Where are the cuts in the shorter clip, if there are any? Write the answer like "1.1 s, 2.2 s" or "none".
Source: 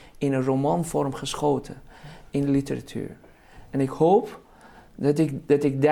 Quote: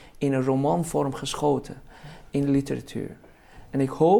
none